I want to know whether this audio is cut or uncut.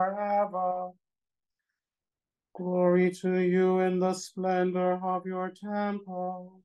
uncut